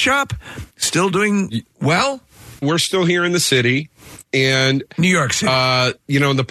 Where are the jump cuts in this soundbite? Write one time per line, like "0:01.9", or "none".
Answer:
0:02.6